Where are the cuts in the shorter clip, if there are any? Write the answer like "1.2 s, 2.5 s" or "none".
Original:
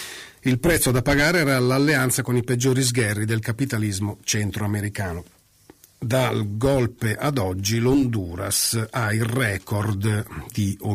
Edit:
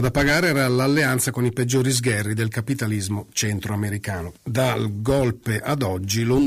4.4 s